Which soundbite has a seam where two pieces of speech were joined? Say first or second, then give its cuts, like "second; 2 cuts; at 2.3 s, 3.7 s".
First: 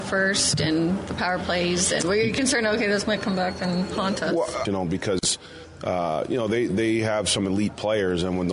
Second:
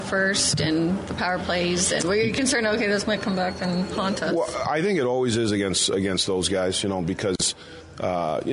first; 1 cut; at 4.7 s